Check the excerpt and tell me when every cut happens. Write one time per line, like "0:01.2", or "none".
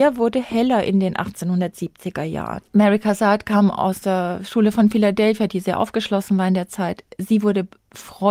0:02.6